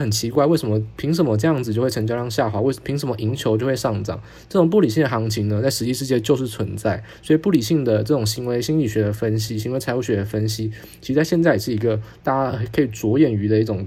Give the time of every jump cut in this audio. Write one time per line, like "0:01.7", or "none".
none

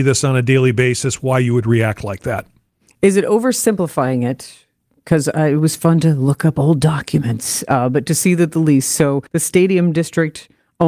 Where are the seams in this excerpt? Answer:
0:09.3

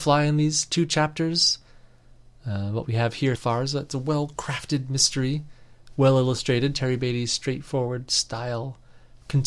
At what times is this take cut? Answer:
0:03.3

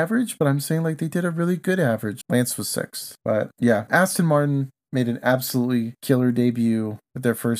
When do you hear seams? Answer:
0:02.2
0:03.9

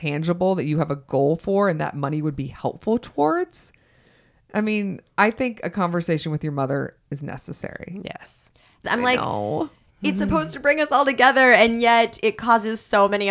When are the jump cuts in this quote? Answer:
0:08.8

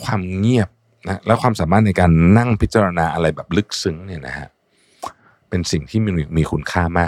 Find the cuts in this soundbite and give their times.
none

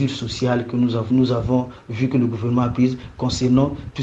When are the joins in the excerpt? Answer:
0:01.1

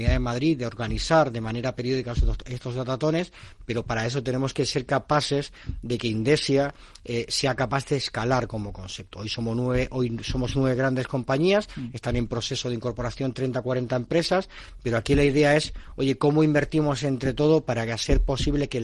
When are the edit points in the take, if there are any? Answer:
none

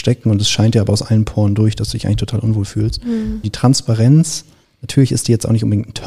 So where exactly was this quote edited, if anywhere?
0:03.4

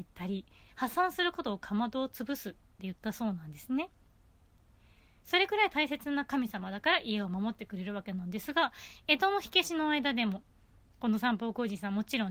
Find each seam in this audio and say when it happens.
none

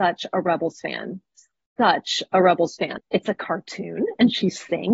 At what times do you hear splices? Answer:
0:03.0

